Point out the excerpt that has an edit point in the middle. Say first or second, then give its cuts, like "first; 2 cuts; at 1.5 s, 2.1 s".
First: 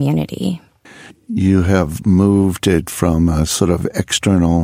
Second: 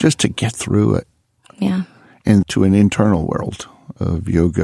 second; 1 cut; at 2.4 s